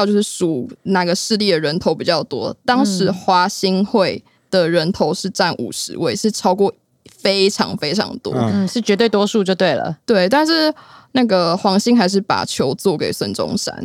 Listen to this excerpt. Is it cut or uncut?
uncut